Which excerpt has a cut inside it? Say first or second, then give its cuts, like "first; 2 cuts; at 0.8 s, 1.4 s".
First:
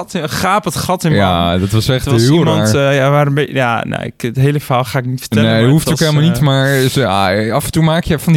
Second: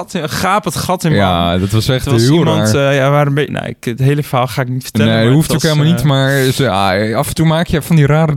second; 1 cut; at 3.5 s